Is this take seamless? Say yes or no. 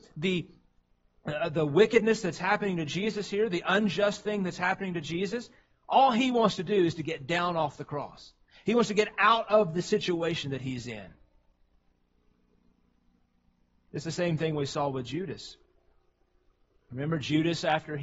yes